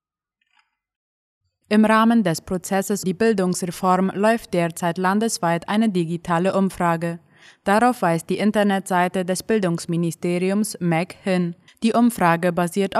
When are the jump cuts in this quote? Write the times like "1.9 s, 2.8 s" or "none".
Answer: 3.0 s, 11.7 s